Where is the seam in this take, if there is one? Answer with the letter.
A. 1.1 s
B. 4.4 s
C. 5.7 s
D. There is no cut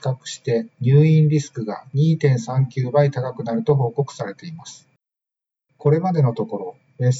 C